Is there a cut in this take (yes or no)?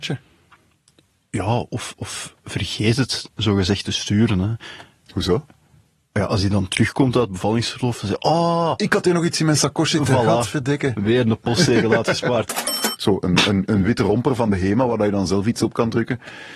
yes